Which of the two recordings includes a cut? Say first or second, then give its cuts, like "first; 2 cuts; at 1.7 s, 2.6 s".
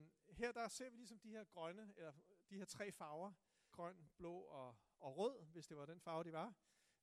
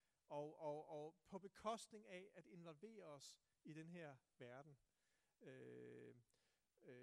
first; 1 cut; at 3.7 s